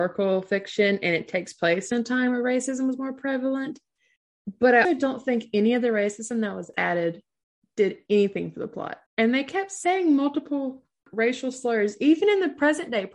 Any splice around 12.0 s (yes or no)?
no